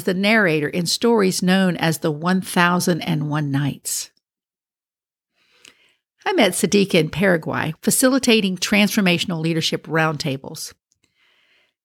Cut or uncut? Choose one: cut